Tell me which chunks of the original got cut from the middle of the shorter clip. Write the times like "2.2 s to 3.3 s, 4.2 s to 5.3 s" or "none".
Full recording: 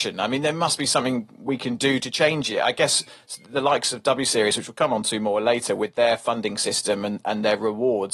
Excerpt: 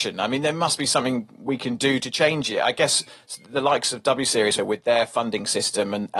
4.6 s to 5.7 s